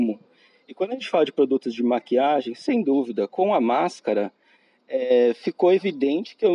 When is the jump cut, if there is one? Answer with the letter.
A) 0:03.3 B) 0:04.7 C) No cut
A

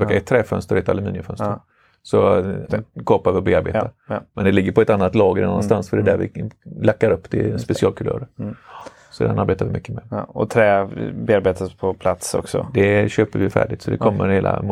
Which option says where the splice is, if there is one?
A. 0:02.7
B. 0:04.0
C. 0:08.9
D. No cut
A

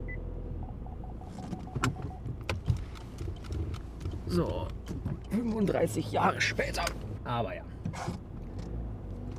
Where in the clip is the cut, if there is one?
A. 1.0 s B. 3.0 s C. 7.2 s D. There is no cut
C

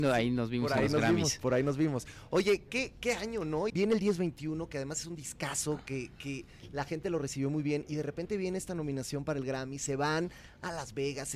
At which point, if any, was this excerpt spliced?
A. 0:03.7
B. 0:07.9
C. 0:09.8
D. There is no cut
A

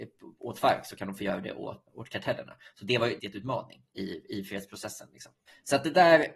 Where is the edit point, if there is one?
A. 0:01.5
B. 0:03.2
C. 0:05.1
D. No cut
B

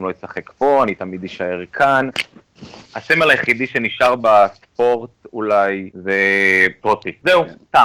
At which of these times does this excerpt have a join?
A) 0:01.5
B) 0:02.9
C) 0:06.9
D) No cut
B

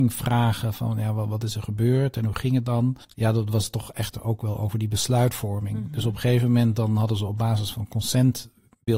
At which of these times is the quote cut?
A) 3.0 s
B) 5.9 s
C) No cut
A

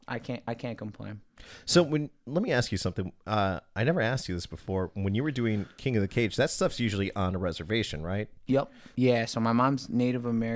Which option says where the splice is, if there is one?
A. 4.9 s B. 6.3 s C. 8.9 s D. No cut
C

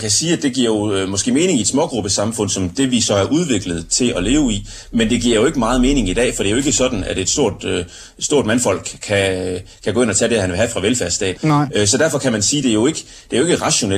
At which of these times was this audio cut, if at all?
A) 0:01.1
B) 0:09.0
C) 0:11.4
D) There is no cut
C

